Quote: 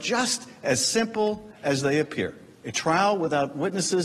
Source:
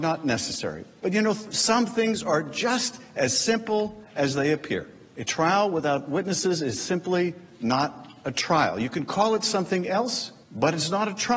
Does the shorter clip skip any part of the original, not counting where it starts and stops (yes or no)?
no